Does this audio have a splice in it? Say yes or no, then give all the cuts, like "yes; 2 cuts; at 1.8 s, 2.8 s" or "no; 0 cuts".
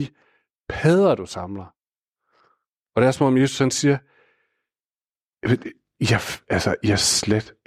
no; 0 cuts